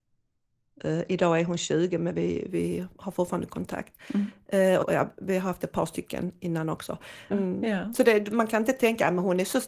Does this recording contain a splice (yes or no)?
yes